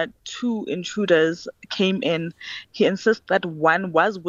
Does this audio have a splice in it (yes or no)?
no